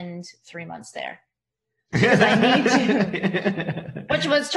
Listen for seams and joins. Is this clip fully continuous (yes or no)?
no